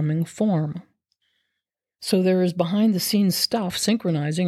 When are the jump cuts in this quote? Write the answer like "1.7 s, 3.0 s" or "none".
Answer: none